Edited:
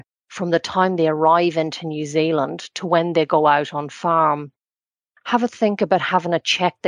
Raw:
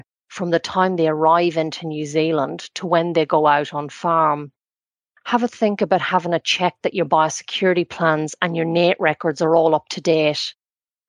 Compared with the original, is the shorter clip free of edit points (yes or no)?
yes